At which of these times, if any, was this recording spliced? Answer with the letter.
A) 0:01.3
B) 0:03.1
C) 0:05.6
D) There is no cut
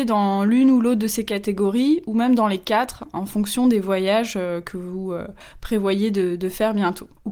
D